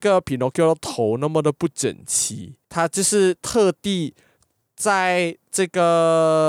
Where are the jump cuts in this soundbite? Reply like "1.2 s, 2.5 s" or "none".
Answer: 2.6 s